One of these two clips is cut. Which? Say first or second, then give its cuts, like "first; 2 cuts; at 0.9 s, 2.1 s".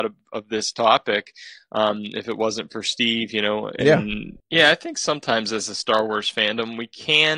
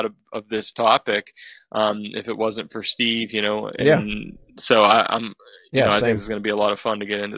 first; 1 cut; at 4.4 s